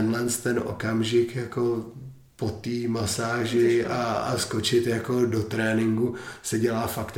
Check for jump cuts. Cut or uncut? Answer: uncut